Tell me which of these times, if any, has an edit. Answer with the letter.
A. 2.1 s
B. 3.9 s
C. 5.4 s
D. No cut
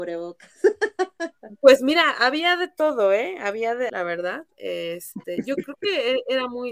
B